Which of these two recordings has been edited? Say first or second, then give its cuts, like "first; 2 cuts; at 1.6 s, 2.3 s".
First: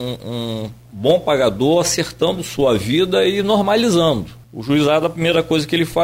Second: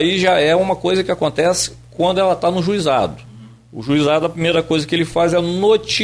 first; 1 cut; at 4.4 s